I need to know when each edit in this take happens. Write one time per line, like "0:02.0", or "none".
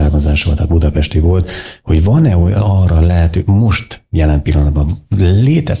none